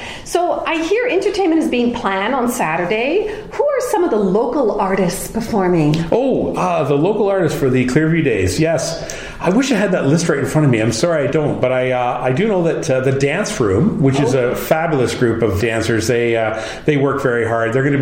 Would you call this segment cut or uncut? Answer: cut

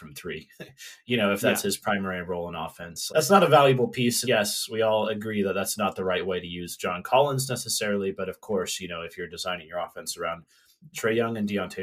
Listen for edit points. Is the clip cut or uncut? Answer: cut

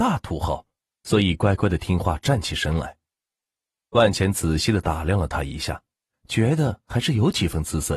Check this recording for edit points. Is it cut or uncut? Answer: cut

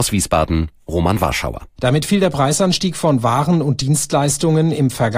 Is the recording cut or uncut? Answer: cut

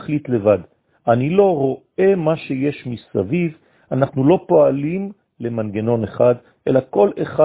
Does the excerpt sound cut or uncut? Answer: uncut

